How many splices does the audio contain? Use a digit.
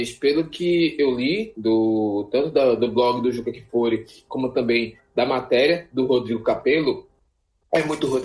0